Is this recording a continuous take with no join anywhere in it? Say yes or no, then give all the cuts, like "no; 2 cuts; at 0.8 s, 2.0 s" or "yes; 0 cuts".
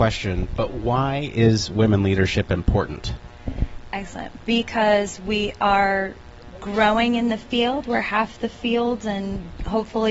yes; 0 cuts